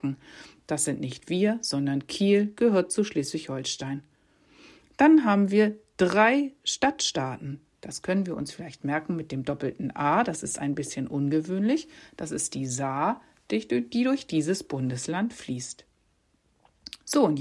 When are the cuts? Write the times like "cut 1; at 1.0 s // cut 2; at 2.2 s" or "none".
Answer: cut 1; at 7.6 s